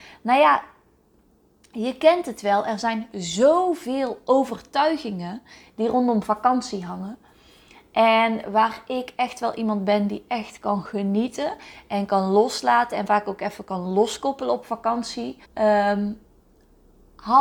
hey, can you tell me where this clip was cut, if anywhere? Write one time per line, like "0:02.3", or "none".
0:15.4